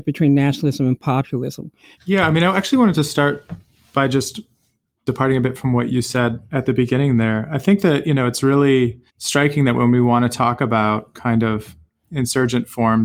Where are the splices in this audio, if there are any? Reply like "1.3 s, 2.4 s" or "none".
2.0 s, 9.1 s

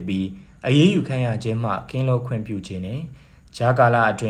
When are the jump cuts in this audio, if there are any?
none

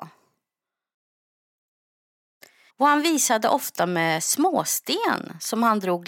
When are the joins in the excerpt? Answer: 2.7 s

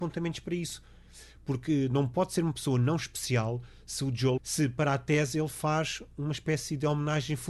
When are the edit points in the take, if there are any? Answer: 4.4 s

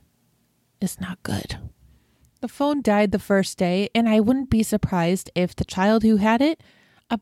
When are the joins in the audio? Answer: 2.8 s

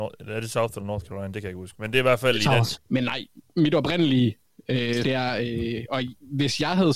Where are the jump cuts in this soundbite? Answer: 2.8 s, 5.0 s

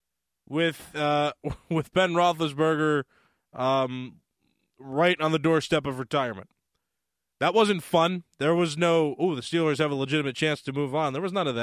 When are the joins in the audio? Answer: none

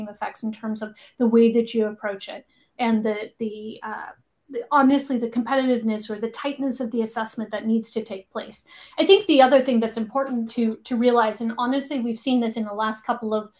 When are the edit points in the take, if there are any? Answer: none

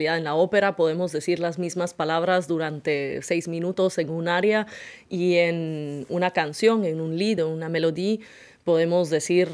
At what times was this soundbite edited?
none

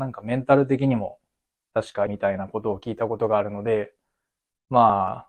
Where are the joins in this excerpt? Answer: 2.1 s

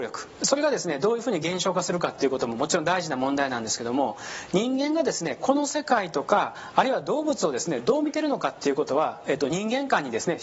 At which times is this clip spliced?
none

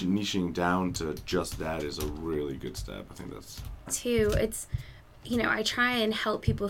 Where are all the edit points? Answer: 3.9 s

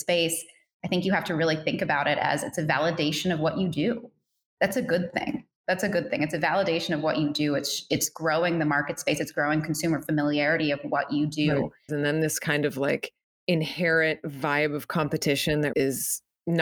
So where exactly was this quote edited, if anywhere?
11.9 s, 15.7 s

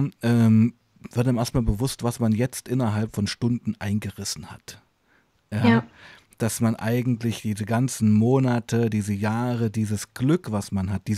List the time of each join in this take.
none

